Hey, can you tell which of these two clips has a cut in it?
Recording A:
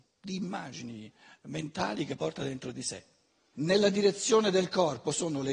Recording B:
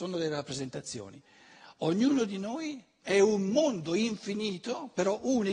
A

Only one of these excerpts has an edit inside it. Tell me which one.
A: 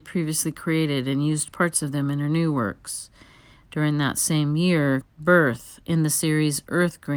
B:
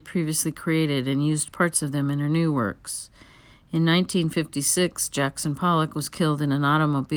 A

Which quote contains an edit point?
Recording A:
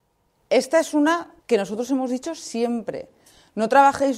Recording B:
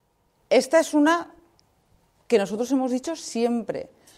A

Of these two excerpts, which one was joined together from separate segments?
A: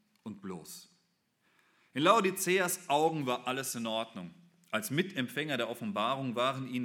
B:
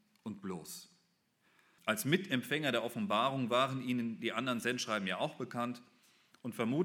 B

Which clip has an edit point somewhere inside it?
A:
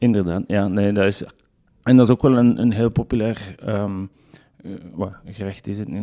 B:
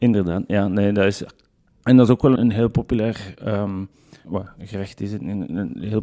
B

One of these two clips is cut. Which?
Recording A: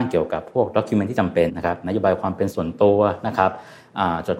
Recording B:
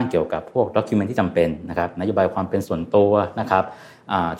A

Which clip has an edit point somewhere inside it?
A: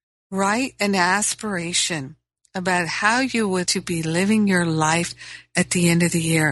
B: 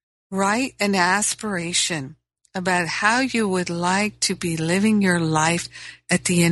A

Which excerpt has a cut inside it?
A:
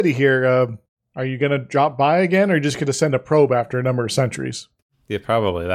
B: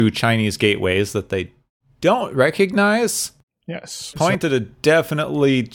B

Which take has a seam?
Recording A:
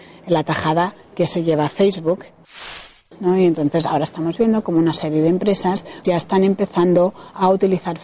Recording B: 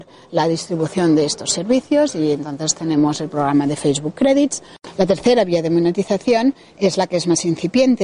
A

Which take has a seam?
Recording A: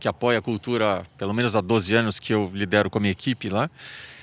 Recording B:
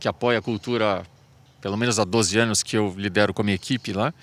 A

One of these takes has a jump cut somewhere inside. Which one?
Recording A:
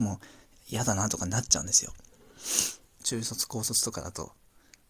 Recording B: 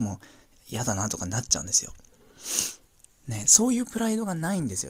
A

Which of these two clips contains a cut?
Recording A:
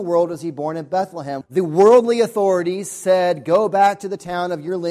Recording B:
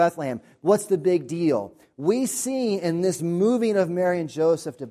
A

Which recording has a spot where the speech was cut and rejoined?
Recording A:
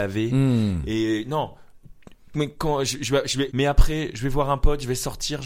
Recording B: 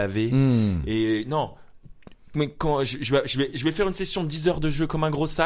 A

